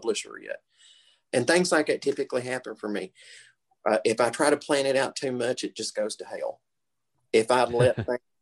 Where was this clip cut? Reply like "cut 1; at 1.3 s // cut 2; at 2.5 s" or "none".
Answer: cut 1; at 1.2 s